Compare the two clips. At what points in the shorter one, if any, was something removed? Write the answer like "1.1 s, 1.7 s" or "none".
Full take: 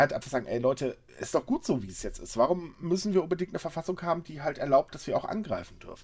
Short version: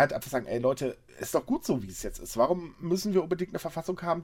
none